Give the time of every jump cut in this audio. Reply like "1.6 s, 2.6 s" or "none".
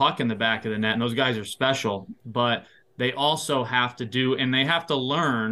none